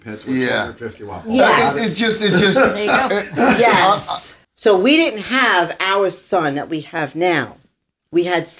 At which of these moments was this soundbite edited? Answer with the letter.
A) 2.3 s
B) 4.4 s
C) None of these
B